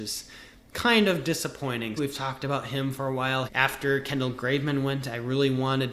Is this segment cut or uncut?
cut